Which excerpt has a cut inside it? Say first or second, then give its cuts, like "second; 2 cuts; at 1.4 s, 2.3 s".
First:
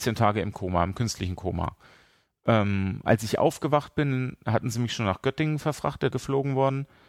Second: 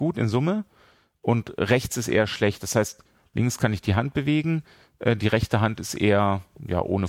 first; 1 cut; at 6.1 s